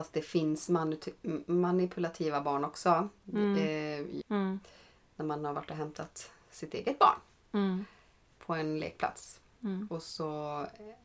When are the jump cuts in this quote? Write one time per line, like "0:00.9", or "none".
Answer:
0:04.2